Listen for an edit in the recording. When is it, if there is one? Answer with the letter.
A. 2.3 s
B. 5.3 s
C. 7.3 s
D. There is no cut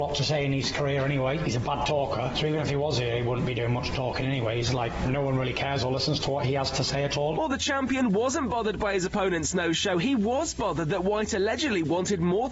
D